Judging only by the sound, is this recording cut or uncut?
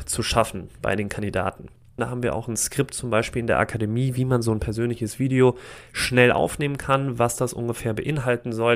cut